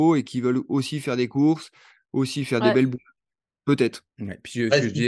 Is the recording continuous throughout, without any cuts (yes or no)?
no